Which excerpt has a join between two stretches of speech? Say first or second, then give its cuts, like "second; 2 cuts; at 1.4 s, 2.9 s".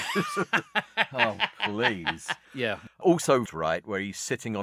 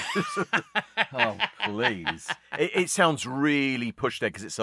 first; 2 cuts; at 2.4 s, 3.5 s